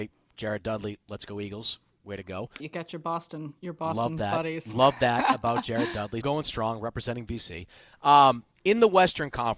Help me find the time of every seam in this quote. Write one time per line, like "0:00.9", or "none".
0:02.6
0:06.2